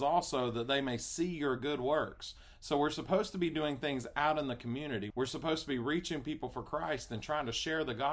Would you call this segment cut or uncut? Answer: cut